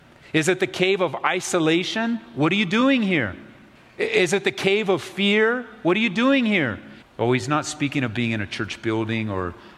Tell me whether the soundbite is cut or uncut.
cut